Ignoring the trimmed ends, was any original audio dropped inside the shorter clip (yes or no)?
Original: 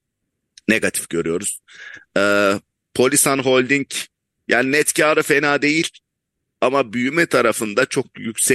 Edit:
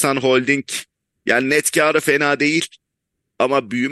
no